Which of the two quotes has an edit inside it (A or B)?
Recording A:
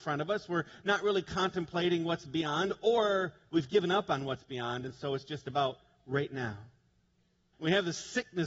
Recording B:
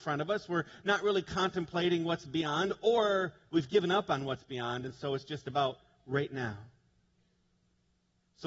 A